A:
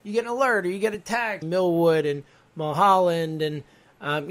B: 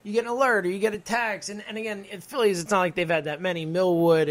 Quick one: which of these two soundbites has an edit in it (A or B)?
A